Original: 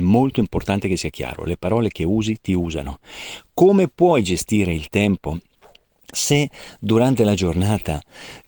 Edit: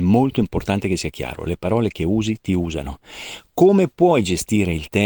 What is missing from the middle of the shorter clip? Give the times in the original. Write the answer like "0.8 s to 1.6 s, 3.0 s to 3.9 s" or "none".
none